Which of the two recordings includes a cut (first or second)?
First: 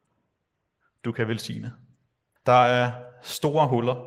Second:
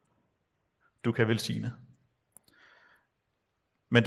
first